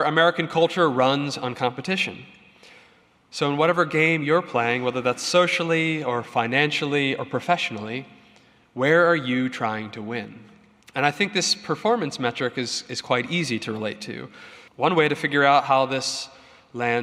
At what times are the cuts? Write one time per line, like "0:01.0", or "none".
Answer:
0:10.8
0:14.7